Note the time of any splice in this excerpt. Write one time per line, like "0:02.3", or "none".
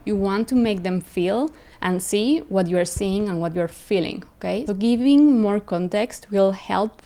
0:04.7